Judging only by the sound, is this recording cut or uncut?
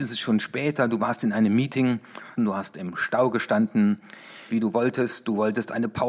cut